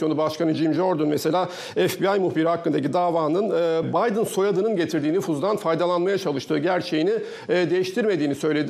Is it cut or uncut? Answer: cut